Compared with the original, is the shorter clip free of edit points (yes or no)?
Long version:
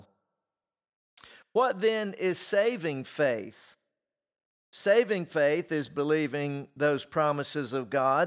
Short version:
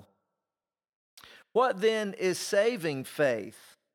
yes